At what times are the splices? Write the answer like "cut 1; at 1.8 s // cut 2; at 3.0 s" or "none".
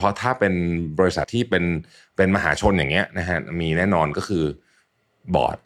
cut 1; at 1.2 s